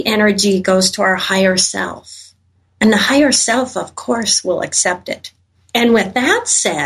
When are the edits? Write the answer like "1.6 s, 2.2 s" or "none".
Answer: none